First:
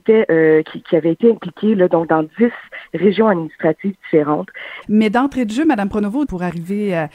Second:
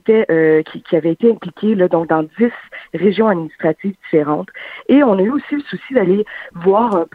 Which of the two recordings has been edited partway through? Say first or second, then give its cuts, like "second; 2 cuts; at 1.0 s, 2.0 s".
first; 2 cuts; at 4.8 s, 6.2 s